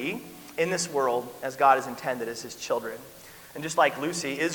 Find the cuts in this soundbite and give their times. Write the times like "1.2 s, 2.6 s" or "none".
none